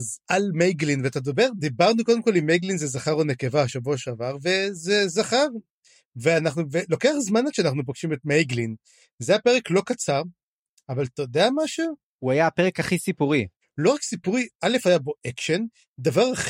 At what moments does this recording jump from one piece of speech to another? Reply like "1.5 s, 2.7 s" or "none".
12.0 s